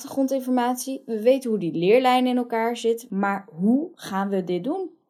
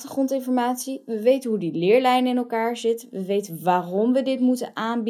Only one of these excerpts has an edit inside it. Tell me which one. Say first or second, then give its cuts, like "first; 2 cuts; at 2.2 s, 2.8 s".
first; 1 cut; at 3.1 s